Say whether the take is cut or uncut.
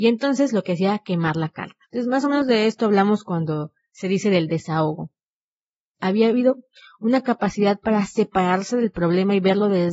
cut